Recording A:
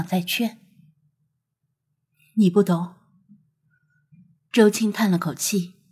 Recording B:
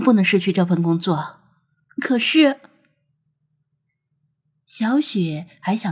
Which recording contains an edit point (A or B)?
B